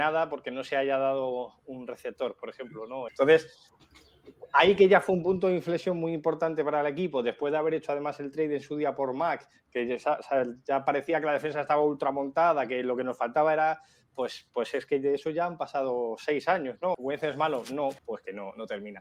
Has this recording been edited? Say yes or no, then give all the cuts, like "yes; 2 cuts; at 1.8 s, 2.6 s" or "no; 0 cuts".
yes; 3 cuts; at 3.1 s, 16.9 s, 18.0 s